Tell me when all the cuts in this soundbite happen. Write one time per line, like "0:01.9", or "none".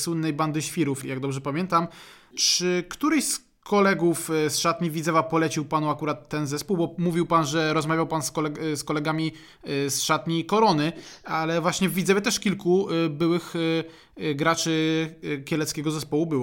0:01.0